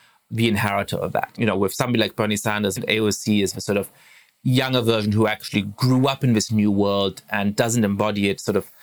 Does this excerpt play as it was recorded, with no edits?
no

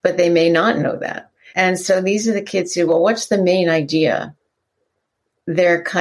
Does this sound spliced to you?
yes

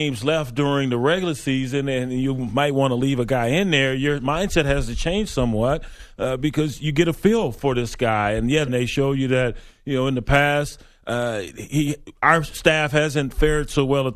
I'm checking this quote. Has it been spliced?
yes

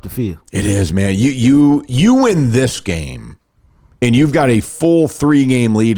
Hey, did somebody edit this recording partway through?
no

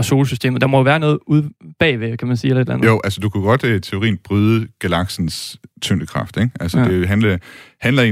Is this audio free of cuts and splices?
yes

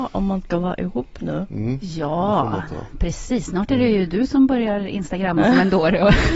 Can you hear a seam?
no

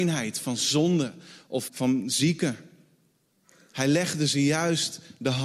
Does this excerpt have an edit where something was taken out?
yes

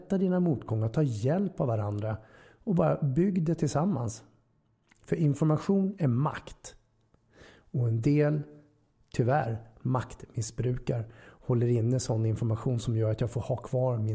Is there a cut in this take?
no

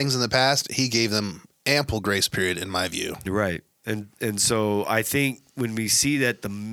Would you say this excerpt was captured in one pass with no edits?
yes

